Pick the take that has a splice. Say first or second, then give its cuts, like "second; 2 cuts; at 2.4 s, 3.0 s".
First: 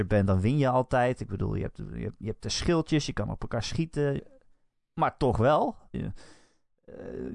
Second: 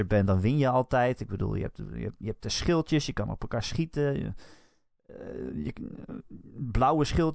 first; 2 cuts; at 4.2 s, 5.9 s